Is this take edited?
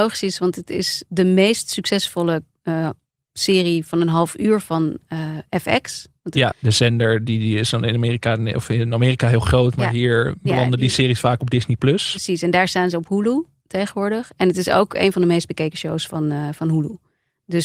yes; 2 cuts; at 1.1 s, 6.5 s

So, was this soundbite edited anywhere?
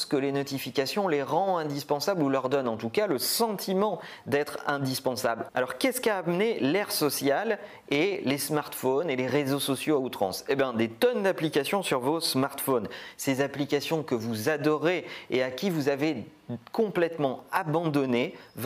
yes; 1 cut; at 5.5 s

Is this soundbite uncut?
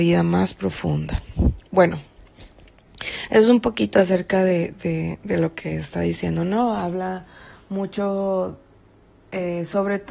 yes; 0 cuts

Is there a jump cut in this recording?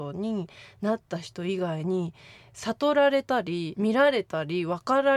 yes; 1 cut; at 3.8 s

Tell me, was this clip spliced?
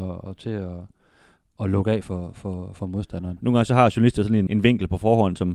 yes; 2 cuts; at 3.4 s, 4.5 s

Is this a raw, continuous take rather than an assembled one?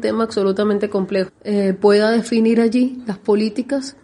no; 1 cut; at 1.3 s

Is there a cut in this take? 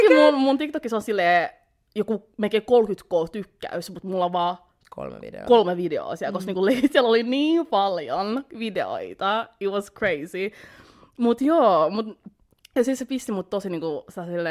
no; 0 cuts

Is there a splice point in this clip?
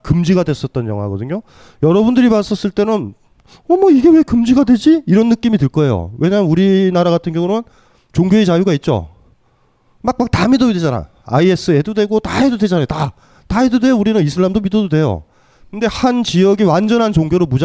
no; 0 cuts

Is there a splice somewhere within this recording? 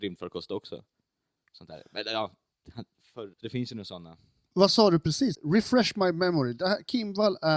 yes; 2 cuts; at 3.3 s, 5.3 s

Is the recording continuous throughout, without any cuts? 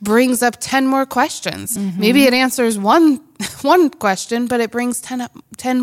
yes; 0 cuts

